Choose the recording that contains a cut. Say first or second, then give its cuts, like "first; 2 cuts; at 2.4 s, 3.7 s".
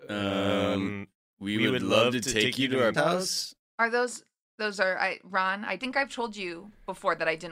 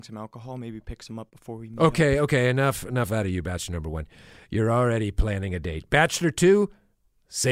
first; 1 cut; at 2.9 s